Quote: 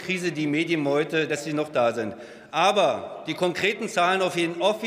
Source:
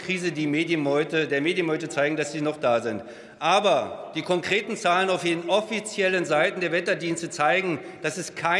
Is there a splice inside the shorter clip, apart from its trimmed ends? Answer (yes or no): yes